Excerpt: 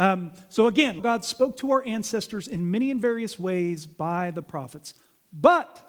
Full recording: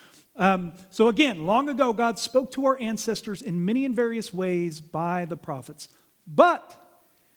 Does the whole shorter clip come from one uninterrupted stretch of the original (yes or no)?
no